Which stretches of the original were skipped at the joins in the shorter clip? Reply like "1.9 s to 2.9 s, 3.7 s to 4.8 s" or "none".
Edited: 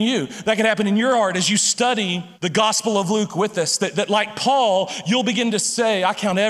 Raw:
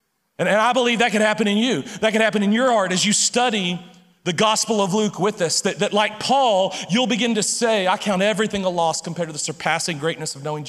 3.9 s to 4.2 s